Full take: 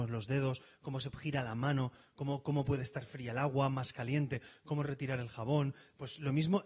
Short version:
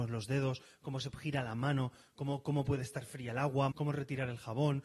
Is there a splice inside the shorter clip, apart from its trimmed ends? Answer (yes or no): yes